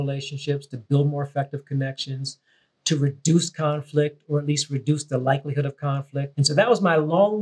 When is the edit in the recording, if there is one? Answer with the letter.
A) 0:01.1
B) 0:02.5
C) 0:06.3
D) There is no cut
C